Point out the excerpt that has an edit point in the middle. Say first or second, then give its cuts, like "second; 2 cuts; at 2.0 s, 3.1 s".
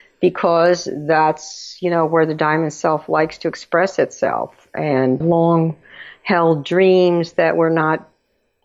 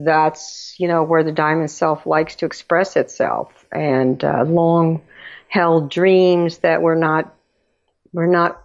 first; 1 cut; at 5.2 s